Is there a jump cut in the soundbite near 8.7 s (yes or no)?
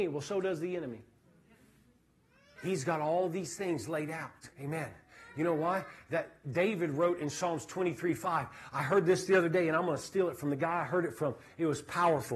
no